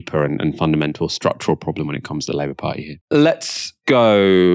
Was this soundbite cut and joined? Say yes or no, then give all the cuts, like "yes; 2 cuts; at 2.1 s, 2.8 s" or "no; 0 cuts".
yes; 1 cut; at 3.0 s